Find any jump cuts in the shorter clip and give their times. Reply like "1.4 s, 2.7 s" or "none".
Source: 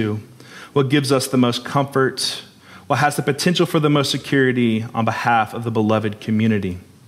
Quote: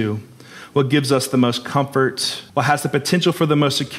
2.5 s